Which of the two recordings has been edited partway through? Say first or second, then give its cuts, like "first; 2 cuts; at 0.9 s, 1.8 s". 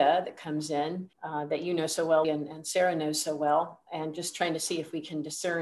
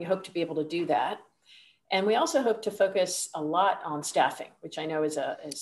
first; 2 cuts; at 1.1 s, 2.2 s